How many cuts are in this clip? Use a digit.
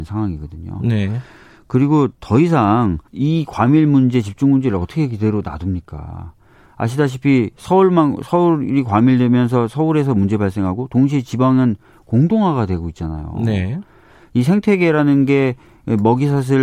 1